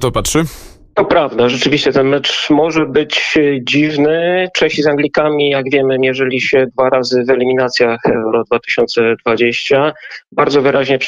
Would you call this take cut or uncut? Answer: uncut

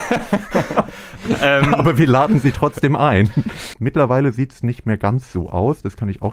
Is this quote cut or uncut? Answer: cut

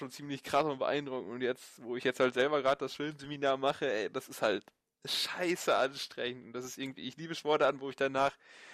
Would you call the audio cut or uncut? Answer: uncut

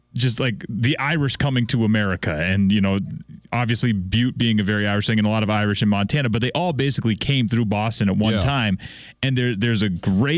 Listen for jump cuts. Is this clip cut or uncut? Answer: uncut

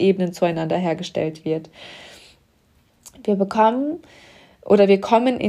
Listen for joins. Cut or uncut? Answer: uncut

